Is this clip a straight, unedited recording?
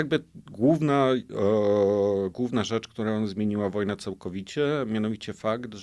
yes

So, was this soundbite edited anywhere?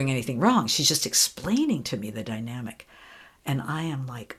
no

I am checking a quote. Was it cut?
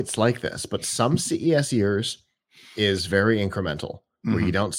no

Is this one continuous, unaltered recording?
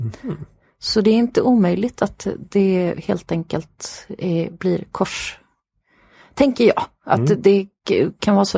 yes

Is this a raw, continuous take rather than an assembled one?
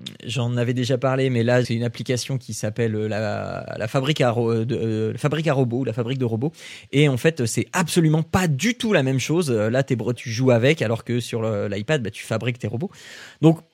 no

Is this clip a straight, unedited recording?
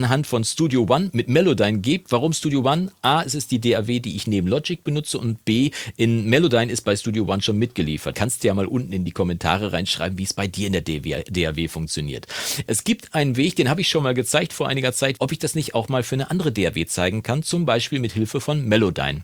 no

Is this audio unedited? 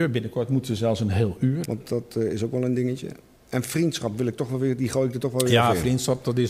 no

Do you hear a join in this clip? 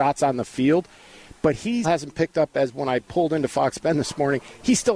yes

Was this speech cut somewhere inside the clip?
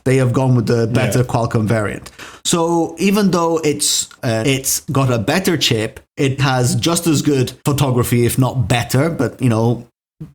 yes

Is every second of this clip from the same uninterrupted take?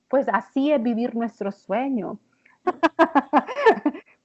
no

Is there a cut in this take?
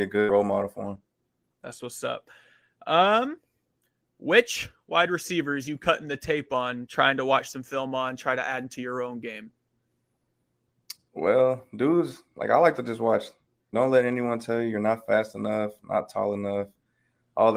yes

